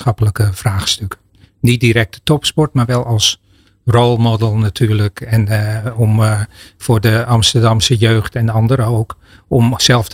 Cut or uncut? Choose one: uncut